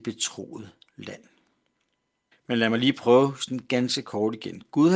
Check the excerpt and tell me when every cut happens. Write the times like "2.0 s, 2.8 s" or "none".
2.3 s